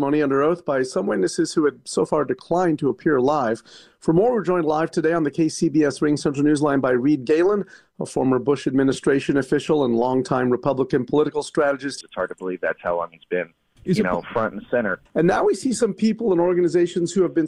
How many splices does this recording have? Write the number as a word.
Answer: two